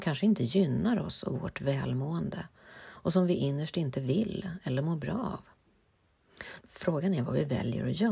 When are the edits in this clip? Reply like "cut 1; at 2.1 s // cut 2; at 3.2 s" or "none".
cut 1; at 6.6 s